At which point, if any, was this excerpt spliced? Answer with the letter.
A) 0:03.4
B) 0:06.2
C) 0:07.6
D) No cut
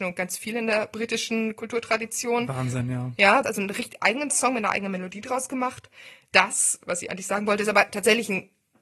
A